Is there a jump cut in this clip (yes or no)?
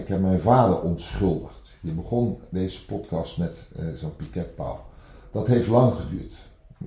no